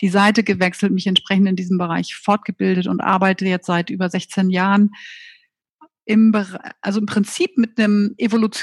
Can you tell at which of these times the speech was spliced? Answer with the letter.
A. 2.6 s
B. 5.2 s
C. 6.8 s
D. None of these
D